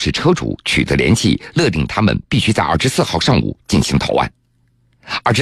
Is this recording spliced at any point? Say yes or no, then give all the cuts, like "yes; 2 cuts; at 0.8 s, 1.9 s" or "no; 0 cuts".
no; 0 cuts